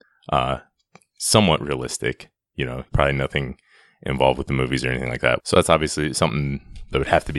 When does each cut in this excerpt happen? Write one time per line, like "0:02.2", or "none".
0:02.9
0:05.4